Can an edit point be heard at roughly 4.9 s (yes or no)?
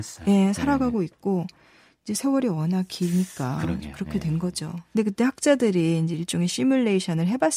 yes